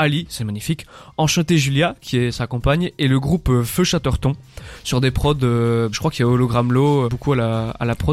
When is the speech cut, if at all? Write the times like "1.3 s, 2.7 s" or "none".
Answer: 5.9 s, 7.1 s